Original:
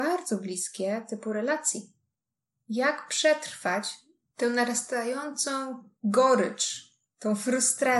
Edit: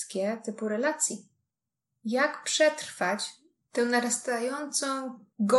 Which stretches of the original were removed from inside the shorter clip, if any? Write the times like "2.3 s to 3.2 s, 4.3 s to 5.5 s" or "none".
none